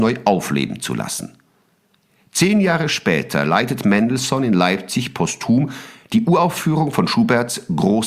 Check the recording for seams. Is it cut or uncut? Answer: uncut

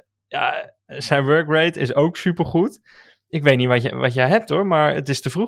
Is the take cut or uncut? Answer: uncut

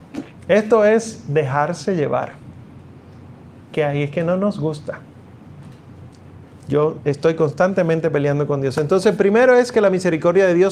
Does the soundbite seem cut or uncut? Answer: uncut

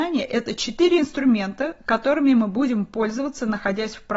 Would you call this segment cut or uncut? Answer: uncut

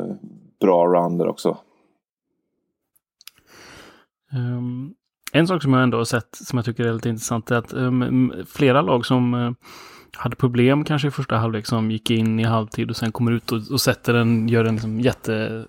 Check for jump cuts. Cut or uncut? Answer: uncut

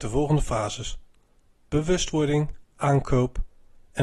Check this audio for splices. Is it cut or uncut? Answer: cut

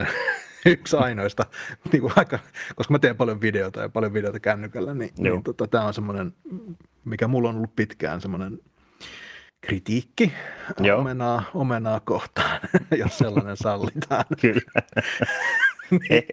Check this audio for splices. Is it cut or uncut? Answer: cut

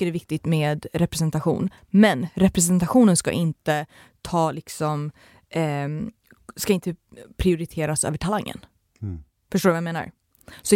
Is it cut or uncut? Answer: uncut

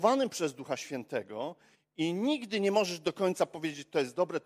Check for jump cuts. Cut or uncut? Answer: uncut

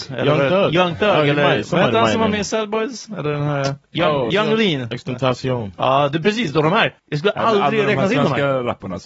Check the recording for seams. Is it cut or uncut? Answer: cut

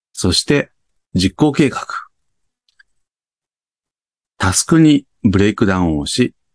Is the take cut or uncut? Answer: uncut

